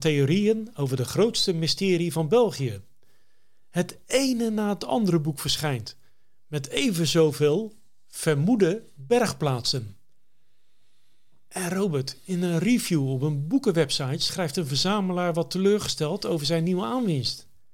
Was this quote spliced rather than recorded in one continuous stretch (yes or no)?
no